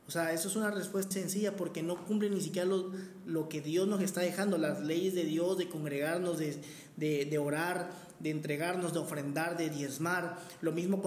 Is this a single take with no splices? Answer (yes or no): no